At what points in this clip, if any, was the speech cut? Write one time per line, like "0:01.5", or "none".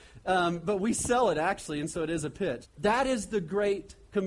0:02.6